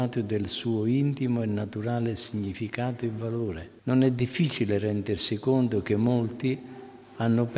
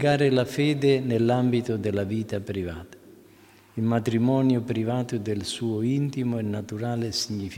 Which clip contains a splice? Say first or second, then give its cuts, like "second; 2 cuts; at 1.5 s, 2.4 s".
first; 1 cut; at 3.8 s